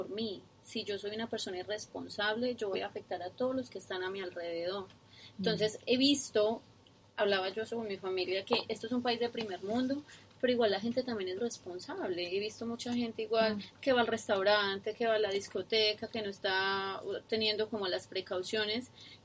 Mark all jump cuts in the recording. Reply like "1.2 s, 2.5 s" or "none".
11.4 s

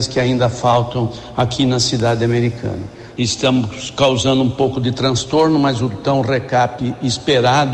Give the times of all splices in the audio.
3.2 s

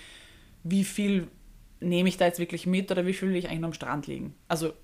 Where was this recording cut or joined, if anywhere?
none

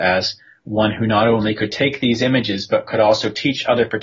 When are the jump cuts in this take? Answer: none

